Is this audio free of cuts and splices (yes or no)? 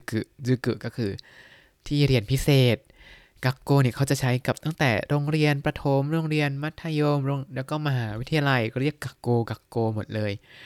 yes